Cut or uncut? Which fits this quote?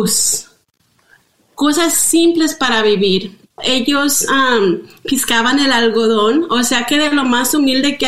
cut